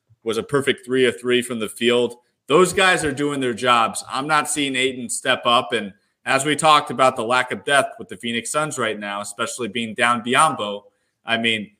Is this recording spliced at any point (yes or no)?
no